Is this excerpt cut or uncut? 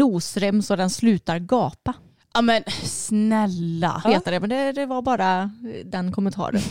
cut